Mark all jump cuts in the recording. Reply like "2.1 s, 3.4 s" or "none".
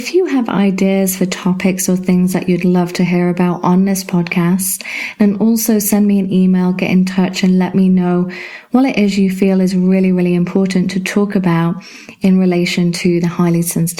none